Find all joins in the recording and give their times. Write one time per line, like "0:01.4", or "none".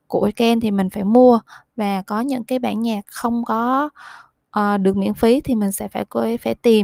none